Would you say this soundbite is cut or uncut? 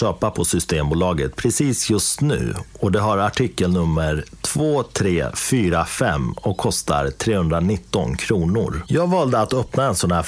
uncut